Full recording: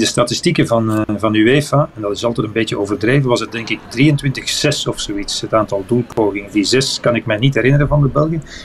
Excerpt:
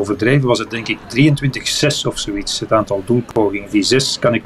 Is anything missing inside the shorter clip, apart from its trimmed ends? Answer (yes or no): no